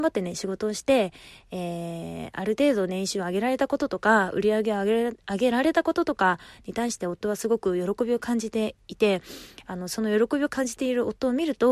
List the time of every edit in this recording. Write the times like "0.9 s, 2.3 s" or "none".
none